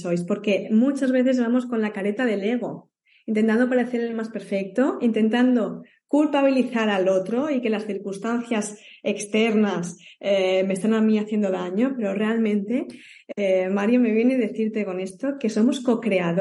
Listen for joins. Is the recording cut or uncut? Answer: uncut